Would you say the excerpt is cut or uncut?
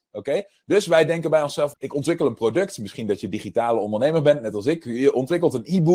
cut